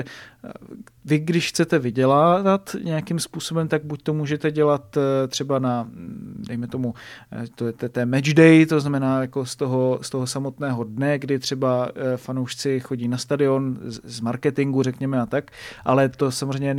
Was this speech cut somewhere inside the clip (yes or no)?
no